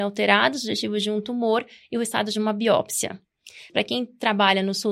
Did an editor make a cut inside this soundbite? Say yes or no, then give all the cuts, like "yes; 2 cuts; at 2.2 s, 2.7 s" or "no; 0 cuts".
yes; 1 cut; at 3.7 s